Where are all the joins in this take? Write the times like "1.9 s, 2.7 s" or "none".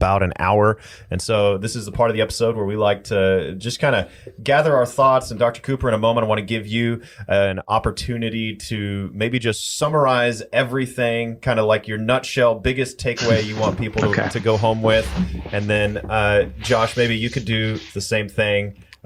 none